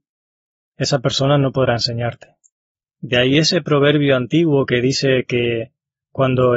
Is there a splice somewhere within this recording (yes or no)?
yes